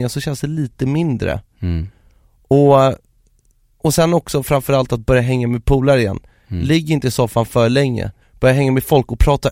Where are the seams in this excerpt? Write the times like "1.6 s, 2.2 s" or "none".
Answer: 8.2 s